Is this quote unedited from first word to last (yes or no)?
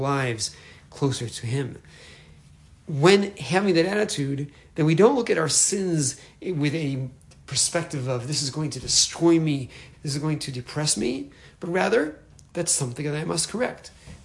no